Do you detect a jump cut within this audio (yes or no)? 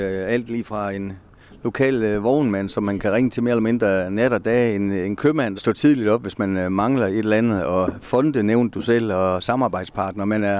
yes